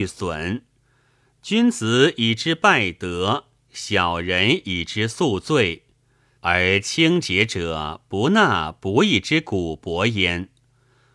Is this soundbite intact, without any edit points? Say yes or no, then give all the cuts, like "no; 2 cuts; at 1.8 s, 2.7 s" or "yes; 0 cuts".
no; 1 cut; at 6.4 s